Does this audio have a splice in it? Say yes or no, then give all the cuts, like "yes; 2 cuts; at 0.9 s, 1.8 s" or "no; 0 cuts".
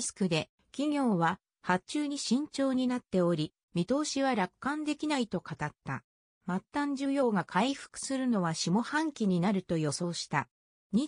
no; 0 cuts